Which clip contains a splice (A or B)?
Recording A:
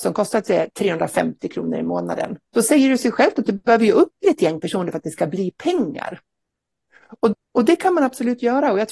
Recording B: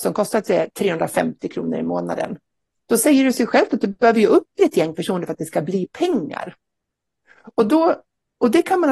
A